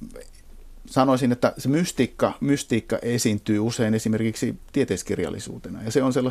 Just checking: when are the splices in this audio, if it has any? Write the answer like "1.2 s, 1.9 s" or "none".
none